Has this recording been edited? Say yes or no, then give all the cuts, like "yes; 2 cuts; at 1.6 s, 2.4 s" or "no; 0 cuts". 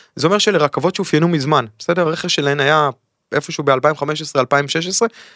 no; 0 cuts